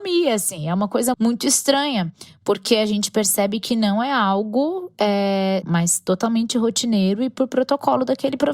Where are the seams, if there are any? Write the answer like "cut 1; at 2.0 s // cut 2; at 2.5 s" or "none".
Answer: cut 1; at 1.1 s // cut 2; at 5.6 s